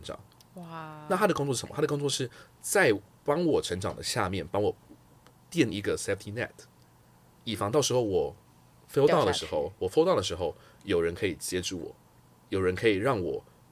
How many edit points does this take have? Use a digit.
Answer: 0